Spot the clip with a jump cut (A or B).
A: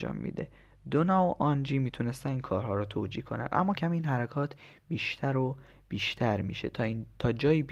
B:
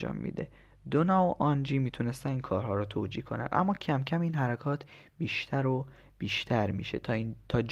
A